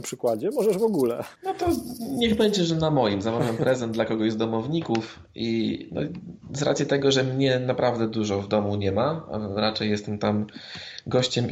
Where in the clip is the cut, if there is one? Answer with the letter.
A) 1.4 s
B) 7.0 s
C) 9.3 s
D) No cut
A